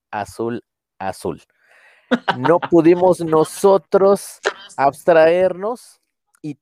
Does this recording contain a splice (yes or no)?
no